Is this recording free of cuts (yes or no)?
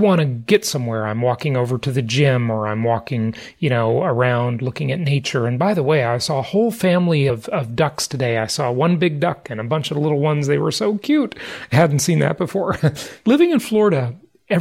yes